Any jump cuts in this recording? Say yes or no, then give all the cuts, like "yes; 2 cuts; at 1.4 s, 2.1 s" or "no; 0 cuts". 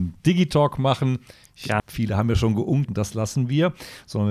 yes; 2 cuts; at 1.8 s, 2.9 s